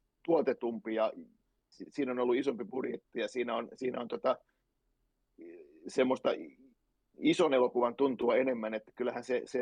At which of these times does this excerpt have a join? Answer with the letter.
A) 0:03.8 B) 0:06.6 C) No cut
C